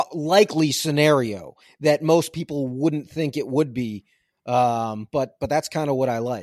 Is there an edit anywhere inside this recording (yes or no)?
no